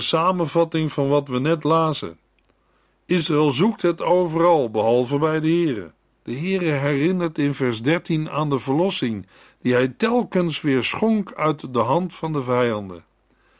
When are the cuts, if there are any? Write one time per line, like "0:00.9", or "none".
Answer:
0:06.2